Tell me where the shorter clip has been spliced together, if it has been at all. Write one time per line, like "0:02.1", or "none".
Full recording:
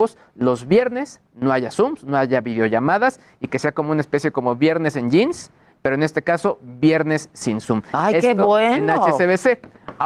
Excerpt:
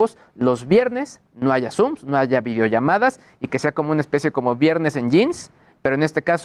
none